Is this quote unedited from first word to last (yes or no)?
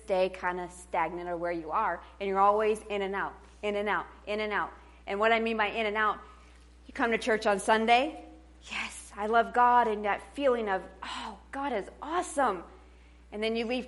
yes